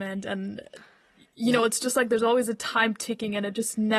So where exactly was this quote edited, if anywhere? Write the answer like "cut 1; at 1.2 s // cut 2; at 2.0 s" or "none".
none